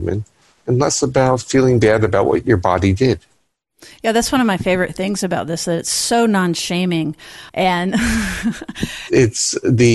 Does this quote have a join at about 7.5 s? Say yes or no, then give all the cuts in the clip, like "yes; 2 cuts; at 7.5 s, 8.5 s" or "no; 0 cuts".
yes; 1 cut; at 7.5 s